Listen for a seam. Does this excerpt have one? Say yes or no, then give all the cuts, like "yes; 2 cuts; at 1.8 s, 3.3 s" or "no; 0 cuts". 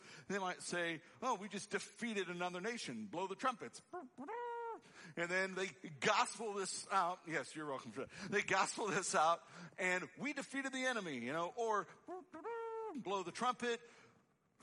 no; 0 cuts